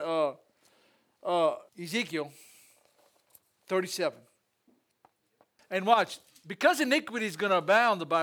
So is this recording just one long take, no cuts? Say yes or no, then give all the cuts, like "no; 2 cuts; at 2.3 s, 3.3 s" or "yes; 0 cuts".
no; 2 cuts; at 1.7 s, 5.6 s